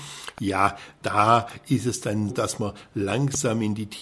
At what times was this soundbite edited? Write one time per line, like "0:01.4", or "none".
0:02.3